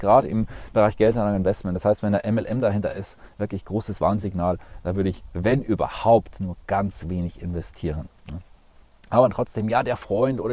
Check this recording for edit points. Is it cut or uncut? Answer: uncut